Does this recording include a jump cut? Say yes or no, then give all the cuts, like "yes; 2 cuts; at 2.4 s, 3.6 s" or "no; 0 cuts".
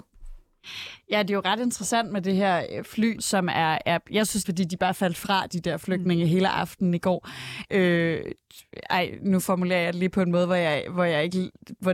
yes; 3 cuts; at 3.2 s, 4.4 s, 7.7 s